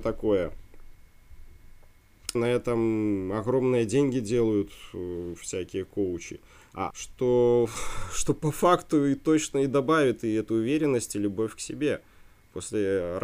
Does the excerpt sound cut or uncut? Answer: cut